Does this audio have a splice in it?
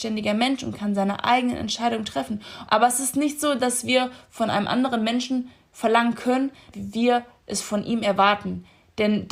yes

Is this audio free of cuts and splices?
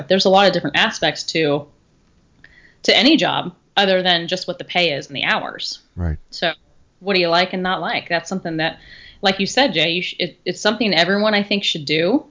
yes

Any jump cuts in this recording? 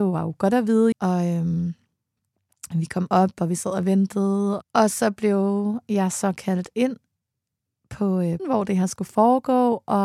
yes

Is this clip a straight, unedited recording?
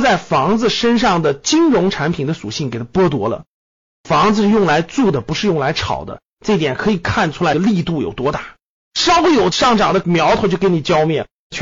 yes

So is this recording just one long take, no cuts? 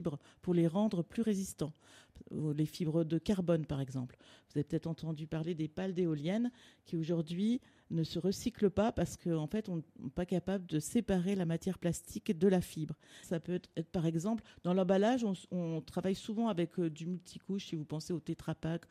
no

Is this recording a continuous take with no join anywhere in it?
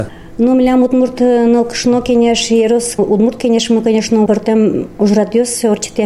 no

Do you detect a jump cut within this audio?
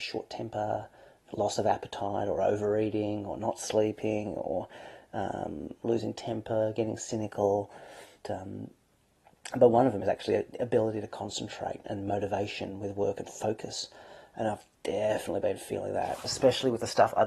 yes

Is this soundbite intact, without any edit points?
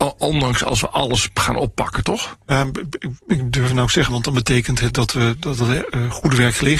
no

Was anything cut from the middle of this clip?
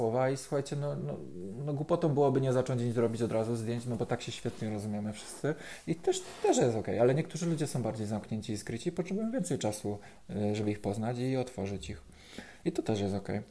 no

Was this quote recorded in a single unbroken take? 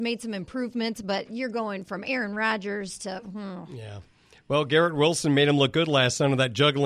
yes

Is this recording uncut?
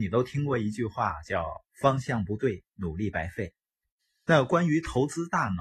yes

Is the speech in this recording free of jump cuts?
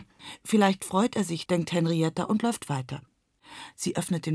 no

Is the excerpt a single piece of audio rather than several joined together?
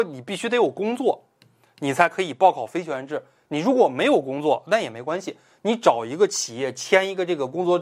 yes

